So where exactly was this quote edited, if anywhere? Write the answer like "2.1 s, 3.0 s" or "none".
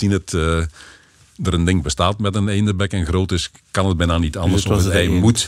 none